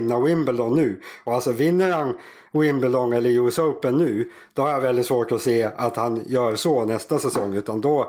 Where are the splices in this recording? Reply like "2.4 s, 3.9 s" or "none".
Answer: none